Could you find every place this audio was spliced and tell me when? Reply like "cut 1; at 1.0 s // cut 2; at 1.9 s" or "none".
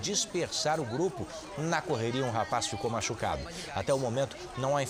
none

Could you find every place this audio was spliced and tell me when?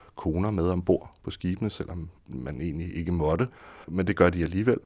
cut 1; at 3.8 s

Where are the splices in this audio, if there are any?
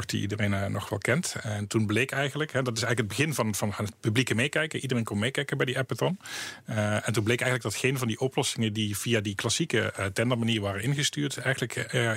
none

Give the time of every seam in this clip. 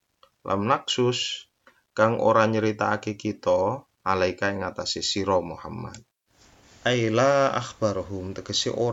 cut 1; at 3.9 s

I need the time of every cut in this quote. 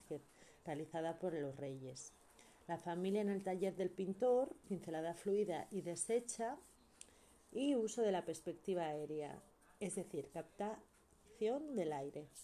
cut 1; at 4.6 s

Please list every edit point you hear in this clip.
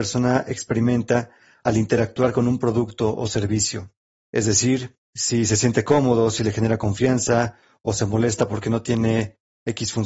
none

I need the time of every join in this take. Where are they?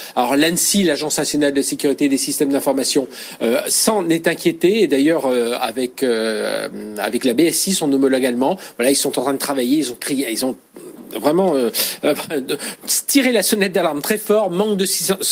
none

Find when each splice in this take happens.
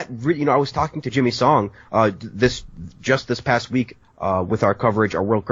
none

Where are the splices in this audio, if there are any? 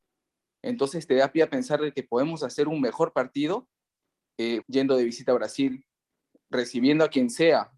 cut 1; at 4.6 s

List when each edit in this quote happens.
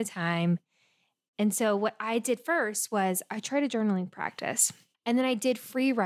cut 1; at 4.9 s

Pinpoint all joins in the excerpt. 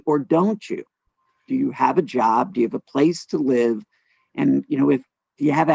none

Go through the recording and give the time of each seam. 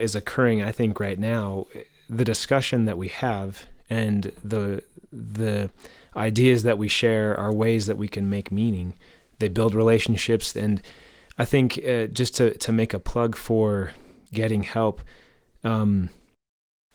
cut 1; at 10.5 s

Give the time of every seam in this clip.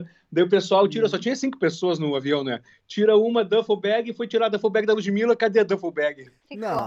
none

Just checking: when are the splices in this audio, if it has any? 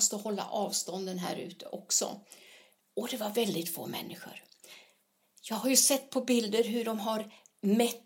cut 1; at 2.8 s

